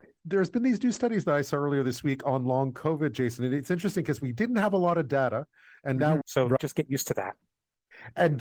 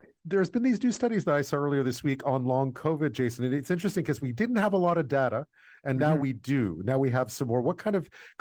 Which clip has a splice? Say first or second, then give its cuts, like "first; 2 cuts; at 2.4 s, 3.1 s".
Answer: first; 1 cut; at 6.2 s